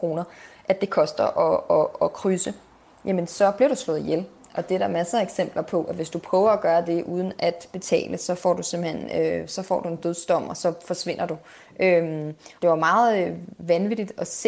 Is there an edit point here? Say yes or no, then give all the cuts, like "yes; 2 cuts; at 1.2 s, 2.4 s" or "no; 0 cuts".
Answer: yes; 1 cut; at 12.6 s